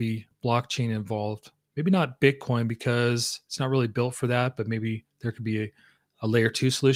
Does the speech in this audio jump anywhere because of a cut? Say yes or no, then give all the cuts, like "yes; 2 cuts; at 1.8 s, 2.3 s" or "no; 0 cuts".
no; 0 cuts